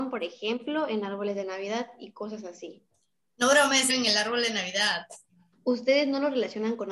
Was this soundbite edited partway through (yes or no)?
yes